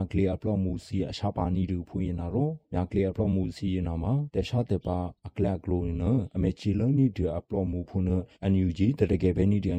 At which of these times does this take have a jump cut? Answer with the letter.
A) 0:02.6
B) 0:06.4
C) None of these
A